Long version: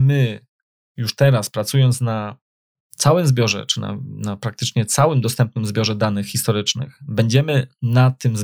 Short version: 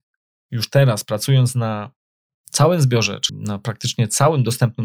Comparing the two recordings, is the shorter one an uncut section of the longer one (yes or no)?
no